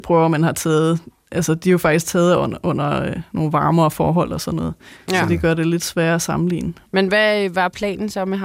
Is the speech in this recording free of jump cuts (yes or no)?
yes